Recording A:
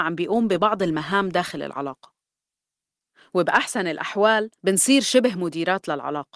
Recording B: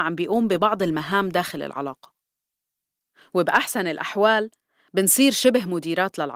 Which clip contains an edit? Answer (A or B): A